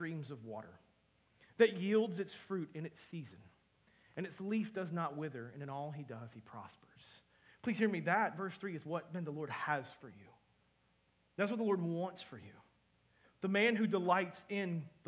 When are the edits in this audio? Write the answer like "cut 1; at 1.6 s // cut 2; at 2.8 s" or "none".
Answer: none